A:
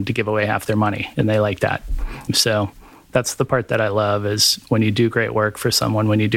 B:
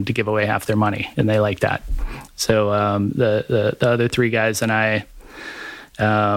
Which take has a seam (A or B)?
A